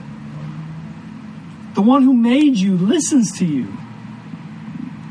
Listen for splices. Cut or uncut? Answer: uncut